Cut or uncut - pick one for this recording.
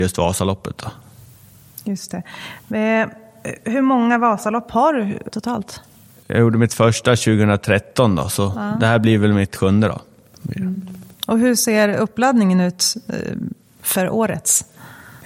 cut